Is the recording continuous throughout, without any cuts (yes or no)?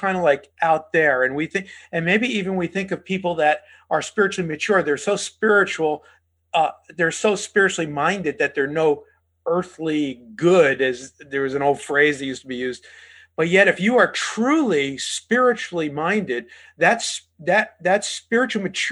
yes